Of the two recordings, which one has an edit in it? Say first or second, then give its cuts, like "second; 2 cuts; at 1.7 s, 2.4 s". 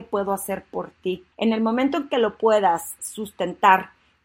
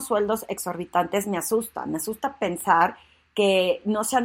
first; 2 cuts; at 1.3 s, 3.0 s